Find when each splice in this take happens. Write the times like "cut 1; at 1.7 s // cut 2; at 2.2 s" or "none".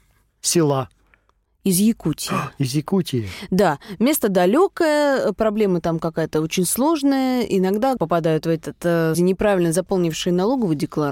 cut 1; at 8.0 s // cut 2; at 9.1 s